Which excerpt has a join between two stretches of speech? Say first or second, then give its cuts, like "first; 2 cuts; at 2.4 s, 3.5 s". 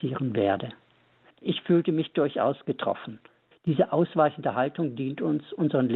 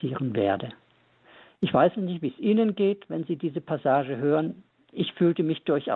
first; 2 cuts; at 1.3 s, 3.5 s